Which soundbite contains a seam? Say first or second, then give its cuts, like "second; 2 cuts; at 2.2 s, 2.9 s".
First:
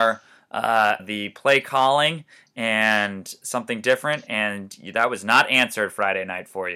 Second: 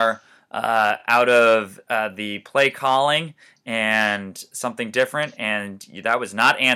first; 1 cut; at 1.0 s